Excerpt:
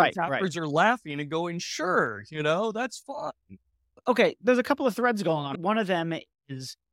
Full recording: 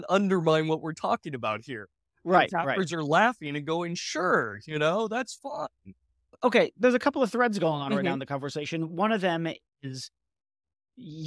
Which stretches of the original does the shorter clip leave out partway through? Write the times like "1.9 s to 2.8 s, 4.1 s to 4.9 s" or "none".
7.9 s to 8.9 s